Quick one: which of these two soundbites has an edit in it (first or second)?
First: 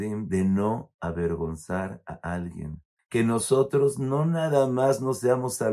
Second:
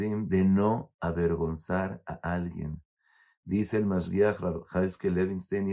first